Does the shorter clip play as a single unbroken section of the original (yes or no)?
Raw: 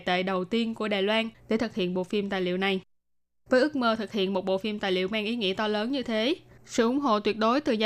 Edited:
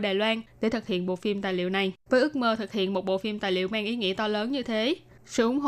no